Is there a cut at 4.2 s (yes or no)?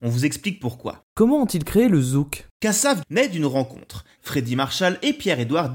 yes